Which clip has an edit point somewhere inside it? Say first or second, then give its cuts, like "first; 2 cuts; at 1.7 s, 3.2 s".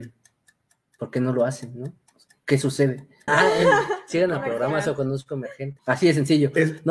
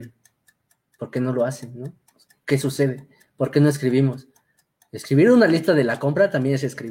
first; 2 cuts; at 3.3 s, 5.8 s